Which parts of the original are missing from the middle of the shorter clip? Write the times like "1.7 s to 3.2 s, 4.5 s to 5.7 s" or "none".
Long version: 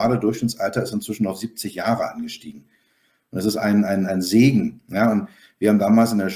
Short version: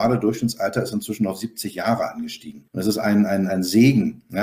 2.7 s to 3.3 s